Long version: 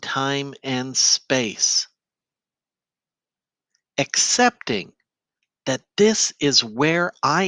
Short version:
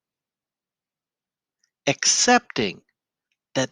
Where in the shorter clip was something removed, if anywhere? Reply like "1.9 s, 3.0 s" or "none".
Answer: none

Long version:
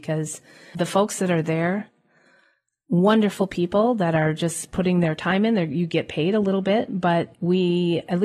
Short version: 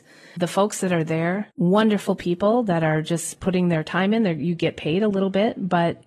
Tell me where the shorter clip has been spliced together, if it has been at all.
1.5 s

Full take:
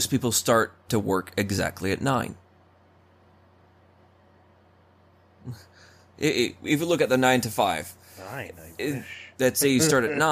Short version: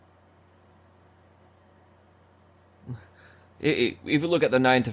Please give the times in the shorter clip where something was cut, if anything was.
none

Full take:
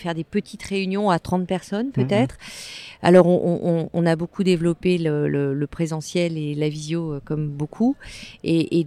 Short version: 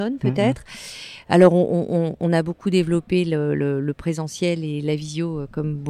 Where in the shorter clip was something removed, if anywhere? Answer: none

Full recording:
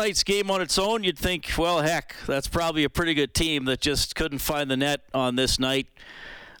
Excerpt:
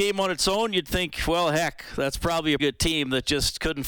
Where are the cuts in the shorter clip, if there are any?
2.6 s

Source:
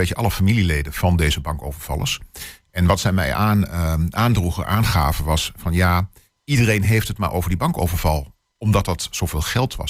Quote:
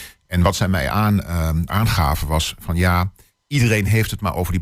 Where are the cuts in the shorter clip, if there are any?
1.7 s

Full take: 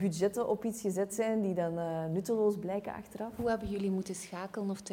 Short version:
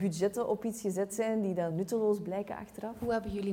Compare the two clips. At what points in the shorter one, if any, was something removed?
1.7 s

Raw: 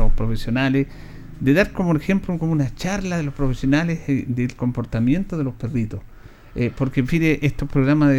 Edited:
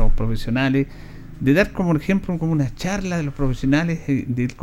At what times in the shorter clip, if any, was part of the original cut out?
none

